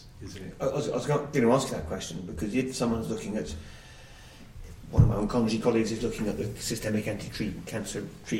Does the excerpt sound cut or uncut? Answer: uncut